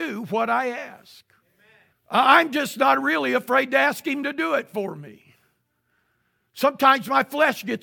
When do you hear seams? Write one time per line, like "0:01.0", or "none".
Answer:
0:01.9